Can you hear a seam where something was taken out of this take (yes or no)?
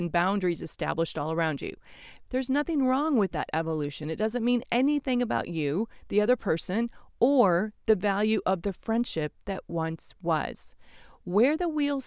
yes